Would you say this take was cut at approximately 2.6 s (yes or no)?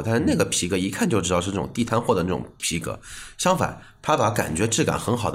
yes